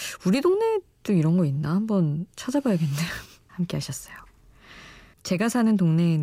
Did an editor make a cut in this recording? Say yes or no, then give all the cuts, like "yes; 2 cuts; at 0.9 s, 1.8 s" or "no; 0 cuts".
yes; 2 cuts; at 3.5 s, 5.1 s